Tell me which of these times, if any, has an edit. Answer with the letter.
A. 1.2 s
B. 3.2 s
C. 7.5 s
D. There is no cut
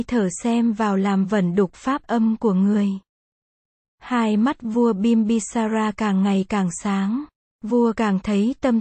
C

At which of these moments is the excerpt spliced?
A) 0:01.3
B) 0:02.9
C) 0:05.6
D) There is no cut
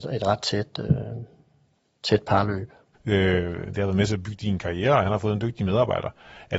B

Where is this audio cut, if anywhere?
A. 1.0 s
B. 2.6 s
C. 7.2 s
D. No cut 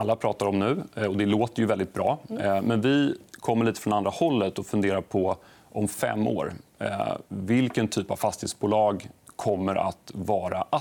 C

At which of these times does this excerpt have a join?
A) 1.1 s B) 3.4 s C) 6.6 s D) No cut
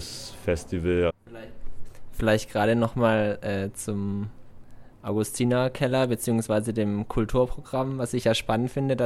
A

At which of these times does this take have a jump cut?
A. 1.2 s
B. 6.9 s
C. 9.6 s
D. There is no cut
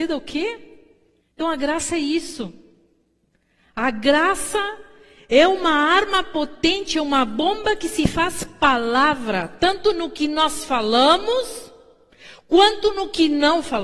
A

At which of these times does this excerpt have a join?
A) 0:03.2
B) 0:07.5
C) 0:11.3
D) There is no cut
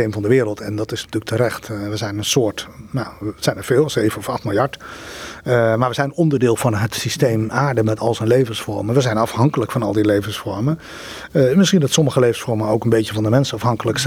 B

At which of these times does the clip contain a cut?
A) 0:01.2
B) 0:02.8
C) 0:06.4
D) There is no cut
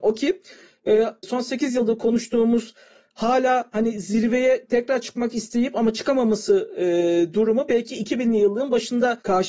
A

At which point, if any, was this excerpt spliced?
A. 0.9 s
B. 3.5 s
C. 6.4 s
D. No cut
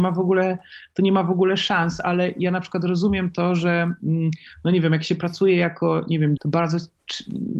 C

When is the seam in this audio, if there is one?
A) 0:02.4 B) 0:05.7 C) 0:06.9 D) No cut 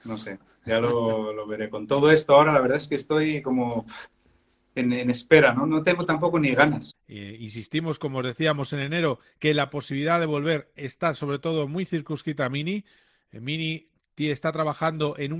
C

